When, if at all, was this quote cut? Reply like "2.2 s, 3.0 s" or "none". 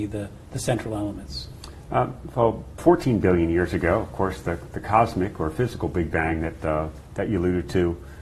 2.8 s

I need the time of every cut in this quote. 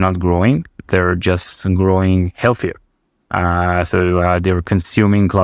none

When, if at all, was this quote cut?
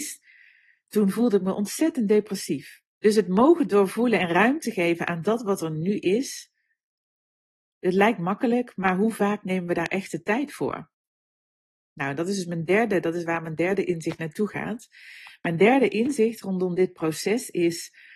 3.0 s

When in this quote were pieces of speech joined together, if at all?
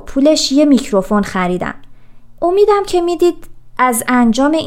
2.4 s

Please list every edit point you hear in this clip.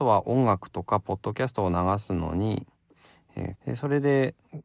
3.6 s

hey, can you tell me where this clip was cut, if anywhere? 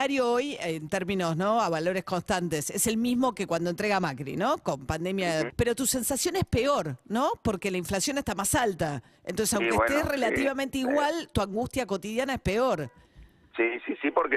5.5 s

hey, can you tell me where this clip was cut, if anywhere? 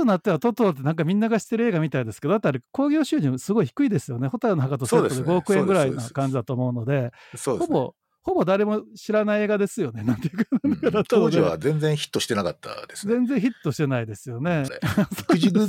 14.7 s

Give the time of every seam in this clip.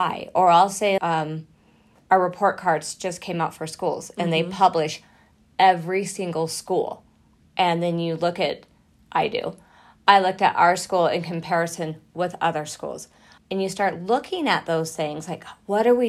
1.0 s, 13.4 s

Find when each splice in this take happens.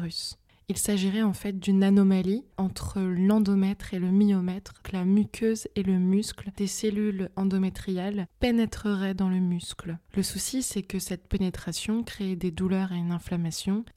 4.8 s

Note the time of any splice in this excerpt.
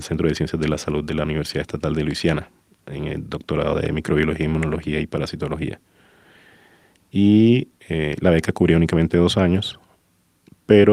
7.8 s

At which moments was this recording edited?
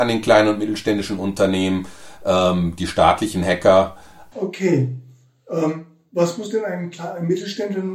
4.3 s

